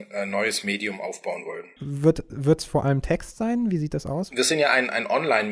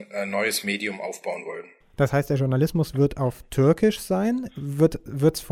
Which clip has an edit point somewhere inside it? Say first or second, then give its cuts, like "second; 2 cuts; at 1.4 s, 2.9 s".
first; 1 cut; at 1.8 s